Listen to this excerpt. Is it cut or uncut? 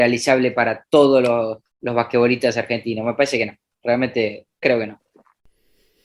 cut